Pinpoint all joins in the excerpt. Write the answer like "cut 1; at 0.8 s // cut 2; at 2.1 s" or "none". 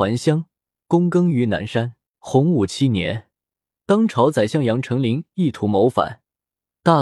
cut 1; at 2.1 s